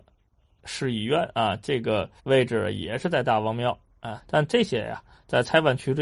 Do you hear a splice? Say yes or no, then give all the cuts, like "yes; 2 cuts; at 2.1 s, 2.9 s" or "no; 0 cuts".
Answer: yes; 2 cuts; at 2.2 s, 4.2 s